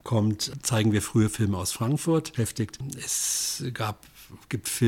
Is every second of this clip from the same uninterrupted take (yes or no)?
no